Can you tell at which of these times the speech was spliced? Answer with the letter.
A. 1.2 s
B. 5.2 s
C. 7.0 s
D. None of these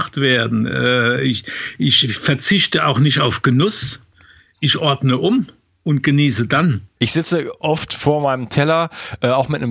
C